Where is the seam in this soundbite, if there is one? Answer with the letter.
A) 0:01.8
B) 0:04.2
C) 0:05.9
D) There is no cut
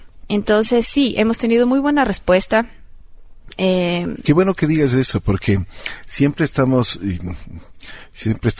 D